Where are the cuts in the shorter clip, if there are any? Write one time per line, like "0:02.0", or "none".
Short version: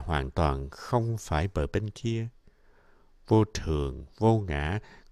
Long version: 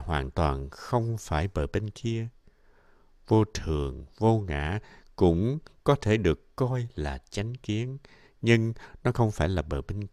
none